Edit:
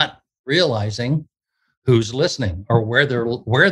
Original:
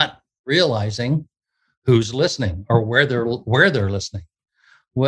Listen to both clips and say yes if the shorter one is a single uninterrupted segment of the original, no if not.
yes